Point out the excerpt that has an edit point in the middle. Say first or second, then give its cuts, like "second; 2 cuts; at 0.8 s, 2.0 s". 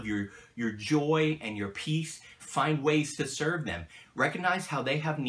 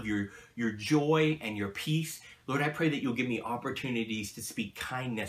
first; 1 cut; at 2.4 s